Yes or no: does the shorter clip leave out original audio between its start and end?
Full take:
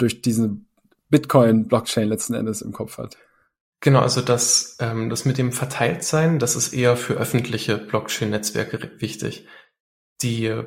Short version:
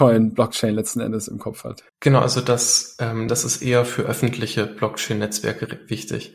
yes